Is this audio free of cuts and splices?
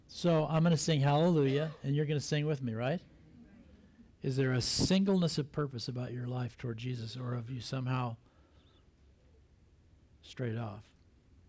no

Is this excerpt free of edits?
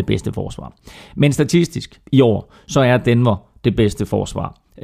yes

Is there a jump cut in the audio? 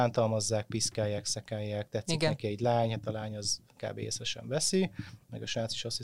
no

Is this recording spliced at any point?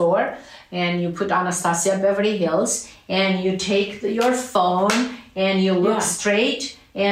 no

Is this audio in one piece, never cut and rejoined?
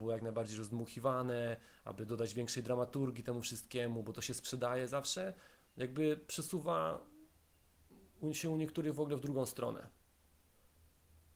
yes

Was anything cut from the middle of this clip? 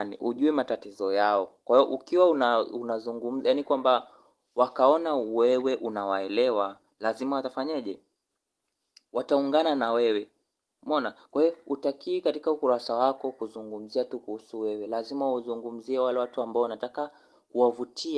no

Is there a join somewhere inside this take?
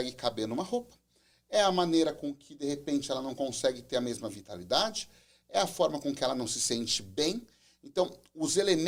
no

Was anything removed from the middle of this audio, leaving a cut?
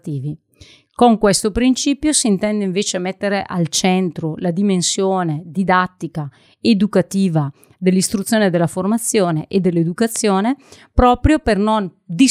no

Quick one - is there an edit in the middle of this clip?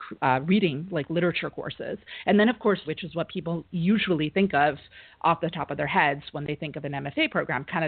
yes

